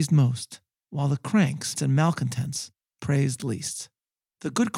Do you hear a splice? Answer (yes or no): yes